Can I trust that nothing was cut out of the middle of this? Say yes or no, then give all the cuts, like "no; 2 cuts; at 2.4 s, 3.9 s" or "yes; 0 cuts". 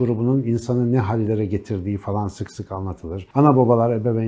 yes; 0 cuts